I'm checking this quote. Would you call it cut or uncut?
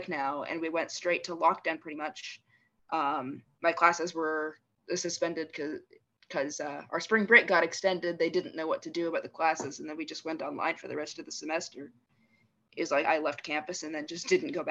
cut